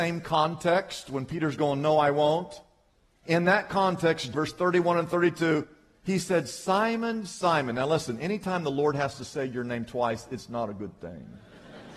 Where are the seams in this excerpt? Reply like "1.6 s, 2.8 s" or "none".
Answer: 4.3 s